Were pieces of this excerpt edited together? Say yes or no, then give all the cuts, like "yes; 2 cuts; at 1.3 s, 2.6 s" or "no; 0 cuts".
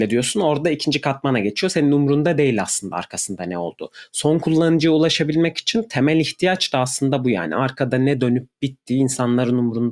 no; 0 cuts